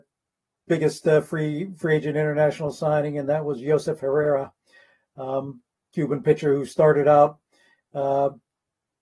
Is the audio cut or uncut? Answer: uncut